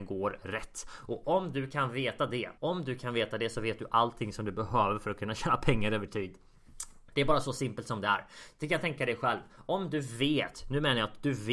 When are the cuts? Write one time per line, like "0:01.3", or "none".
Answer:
0:02.6

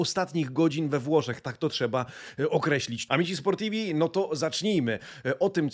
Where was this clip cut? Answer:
0:03.1

